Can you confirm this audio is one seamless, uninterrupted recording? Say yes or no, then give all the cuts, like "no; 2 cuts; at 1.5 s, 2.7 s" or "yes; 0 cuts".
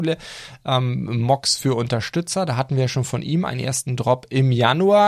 yes; 0 cuts